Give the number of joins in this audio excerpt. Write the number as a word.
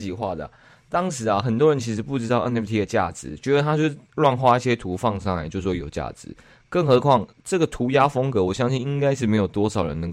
zero